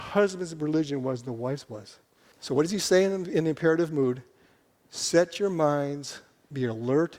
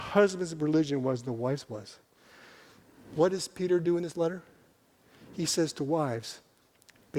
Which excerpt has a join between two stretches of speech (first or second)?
first